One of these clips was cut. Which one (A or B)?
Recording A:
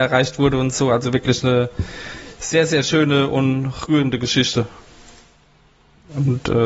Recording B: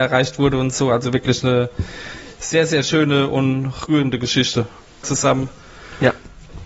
B